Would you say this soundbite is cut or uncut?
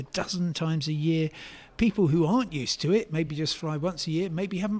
uncut